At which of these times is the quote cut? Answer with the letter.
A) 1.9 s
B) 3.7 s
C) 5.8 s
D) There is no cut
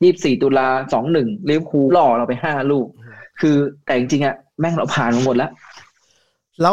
A